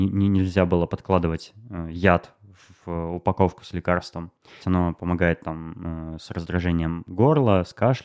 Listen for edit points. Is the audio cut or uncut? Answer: cut